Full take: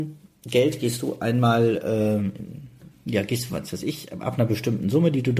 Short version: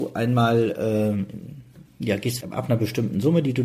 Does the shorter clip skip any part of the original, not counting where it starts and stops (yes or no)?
yes